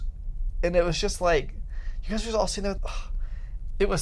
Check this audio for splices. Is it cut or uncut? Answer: cut